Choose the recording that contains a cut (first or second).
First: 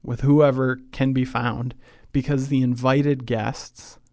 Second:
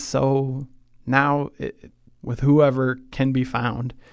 second